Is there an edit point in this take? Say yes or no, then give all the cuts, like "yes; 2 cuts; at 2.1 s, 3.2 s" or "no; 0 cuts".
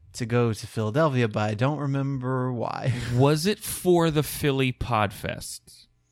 no; 0 cuts